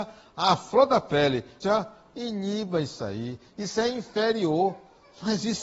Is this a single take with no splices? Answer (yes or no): no